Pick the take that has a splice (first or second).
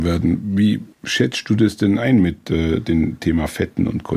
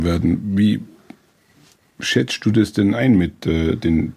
first